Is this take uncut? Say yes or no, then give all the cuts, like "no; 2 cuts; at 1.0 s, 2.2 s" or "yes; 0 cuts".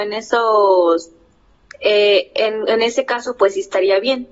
yes; 0 cuts